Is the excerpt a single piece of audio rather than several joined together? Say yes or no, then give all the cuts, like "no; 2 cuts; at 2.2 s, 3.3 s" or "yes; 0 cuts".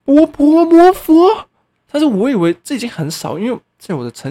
no; 1 cut; at 1.7 s